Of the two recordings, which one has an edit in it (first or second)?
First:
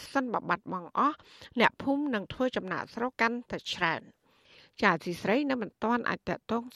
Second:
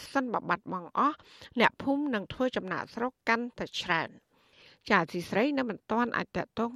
first